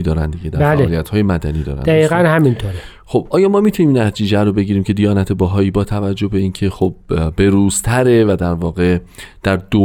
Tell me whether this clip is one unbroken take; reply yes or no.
yes